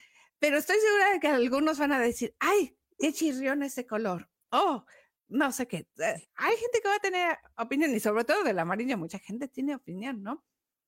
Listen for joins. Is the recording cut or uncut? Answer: uncut